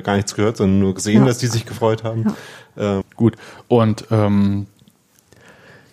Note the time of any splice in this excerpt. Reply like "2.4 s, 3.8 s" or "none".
3.0 s